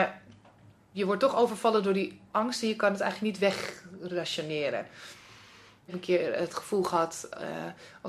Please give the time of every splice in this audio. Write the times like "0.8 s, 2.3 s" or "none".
none